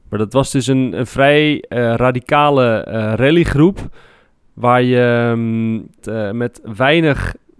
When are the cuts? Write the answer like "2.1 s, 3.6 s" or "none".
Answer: 0.9 s